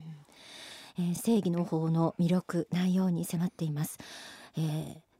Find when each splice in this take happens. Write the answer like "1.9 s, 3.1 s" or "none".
none